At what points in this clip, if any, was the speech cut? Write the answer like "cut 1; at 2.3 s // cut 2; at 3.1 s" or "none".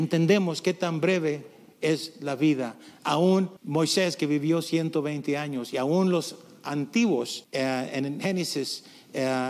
cut 1; at 3.6 s // cut 2; at 7.4 s